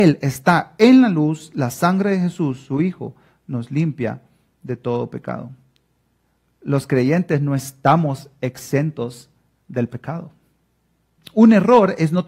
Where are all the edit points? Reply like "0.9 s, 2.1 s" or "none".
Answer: 11.2 s

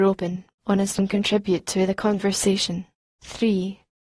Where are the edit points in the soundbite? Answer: none

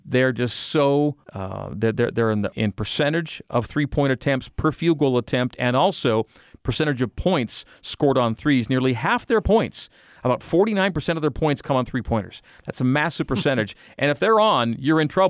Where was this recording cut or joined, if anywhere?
1.2 s, 2.5 s

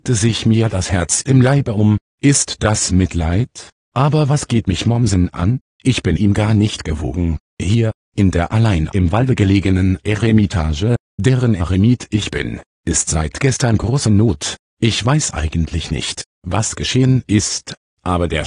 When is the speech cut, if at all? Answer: 2.1 s

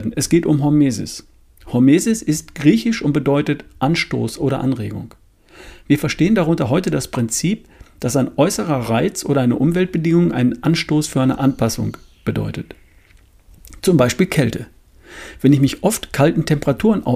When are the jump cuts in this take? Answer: none

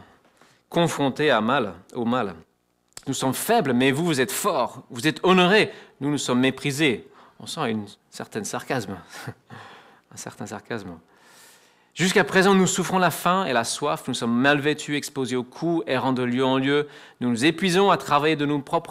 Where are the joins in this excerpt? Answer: 3.0 s

